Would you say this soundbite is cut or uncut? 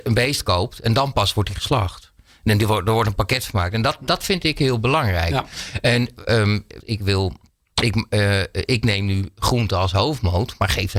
cut